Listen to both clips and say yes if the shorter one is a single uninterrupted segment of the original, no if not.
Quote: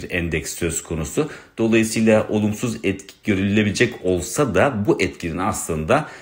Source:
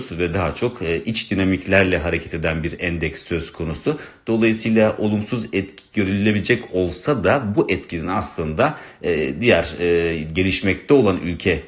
yes